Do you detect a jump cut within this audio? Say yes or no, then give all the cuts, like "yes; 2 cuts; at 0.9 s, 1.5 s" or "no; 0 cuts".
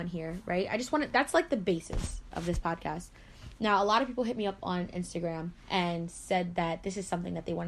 yes; 1 cut; at 2.3 s